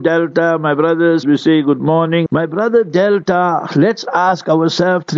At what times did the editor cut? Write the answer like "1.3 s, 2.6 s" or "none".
1.2 s, 2.3 s